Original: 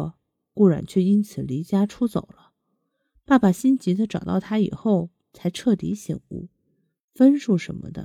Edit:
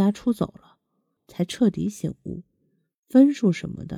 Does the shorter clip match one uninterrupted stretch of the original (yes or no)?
no